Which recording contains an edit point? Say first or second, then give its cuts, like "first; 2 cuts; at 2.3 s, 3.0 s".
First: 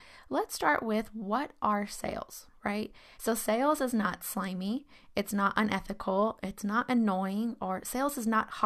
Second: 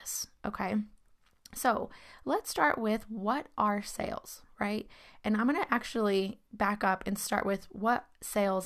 first; 1 cut; at 3.2 s